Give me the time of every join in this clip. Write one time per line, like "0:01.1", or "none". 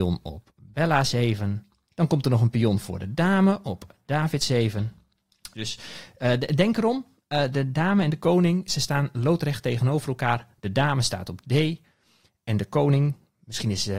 0:01.9
0:05.5